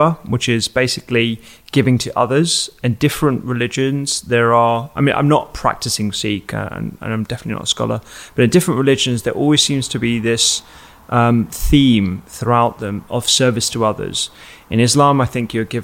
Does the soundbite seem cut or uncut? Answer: uncut